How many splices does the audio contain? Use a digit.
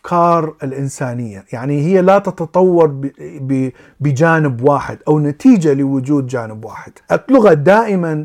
1